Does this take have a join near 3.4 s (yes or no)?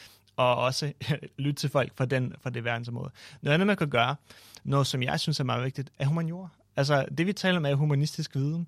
no